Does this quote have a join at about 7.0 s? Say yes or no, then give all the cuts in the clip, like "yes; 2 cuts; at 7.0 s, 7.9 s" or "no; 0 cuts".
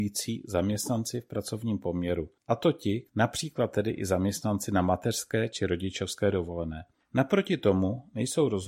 no; 1 cut; at 3.1 s